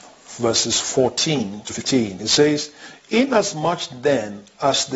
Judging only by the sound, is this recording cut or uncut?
uncut